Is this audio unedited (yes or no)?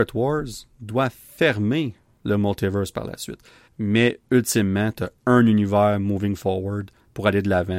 no